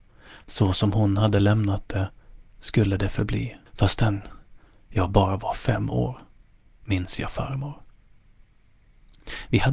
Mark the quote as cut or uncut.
cut